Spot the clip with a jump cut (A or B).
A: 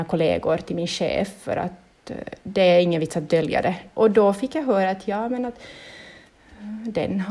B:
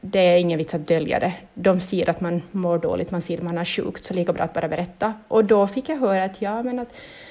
A